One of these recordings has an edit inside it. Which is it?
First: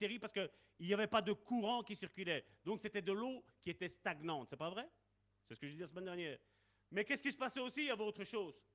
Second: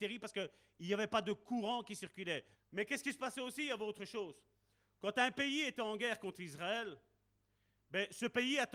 second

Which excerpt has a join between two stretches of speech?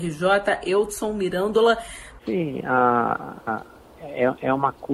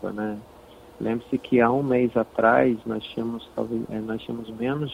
first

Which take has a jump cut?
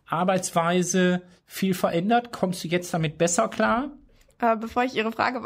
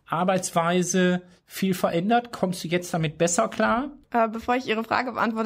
second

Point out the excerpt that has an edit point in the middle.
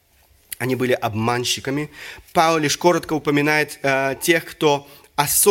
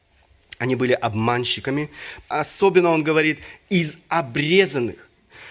second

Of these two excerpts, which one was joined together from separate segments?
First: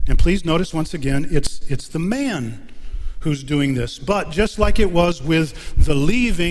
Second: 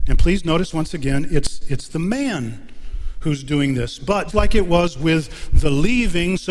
second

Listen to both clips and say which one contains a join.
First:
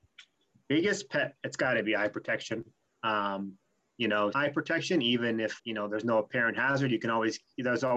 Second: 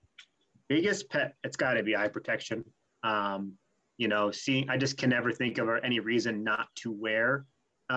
first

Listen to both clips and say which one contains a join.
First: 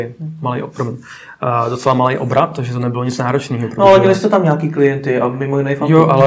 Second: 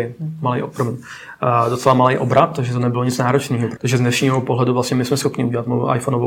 second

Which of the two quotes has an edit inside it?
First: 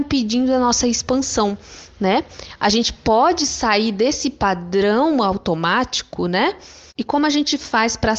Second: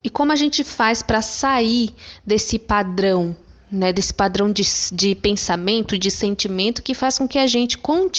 first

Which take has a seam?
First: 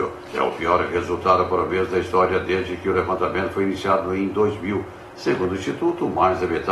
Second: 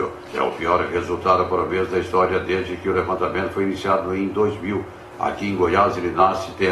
second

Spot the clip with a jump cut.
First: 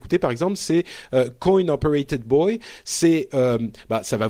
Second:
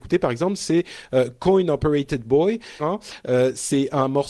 second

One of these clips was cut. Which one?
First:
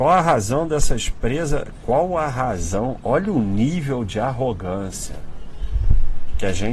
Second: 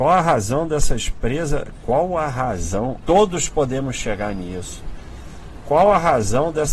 second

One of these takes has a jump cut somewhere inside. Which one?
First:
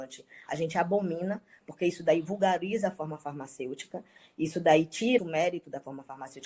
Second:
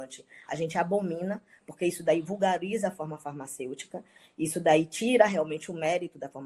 first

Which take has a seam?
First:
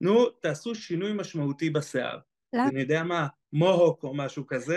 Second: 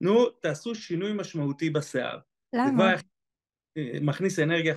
first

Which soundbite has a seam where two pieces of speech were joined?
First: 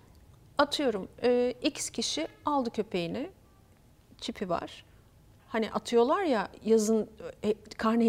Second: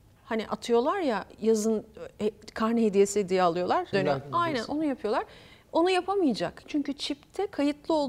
second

